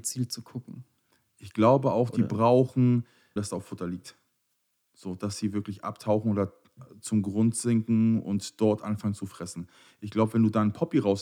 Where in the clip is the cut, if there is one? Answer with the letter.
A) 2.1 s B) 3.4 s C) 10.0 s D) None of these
B